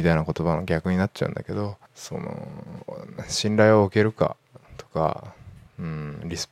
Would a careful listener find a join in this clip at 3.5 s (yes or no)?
no